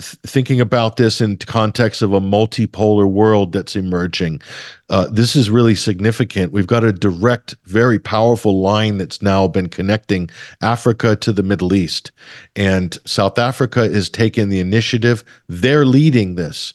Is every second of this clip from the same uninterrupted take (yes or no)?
yes